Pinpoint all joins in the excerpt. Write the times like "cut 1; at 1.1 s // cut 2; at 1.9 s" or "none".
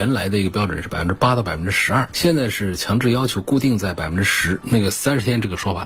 cut 1; at 4.6 s